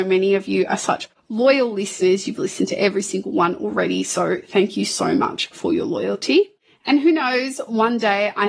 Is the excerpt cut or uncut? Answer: uncut